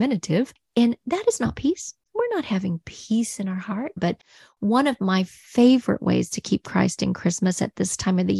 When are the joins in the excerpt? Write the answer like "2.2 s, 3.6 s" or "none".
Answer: 4.0 s